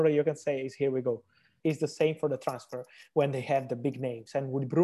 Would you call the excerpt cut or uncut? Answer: cut